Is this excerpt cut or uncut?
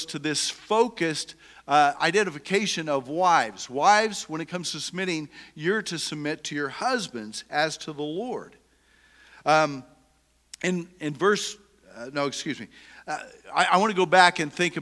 uncut